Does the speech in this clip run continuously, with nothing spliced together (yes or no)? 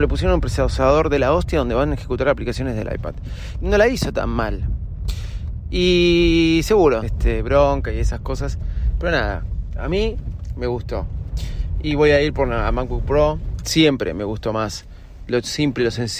no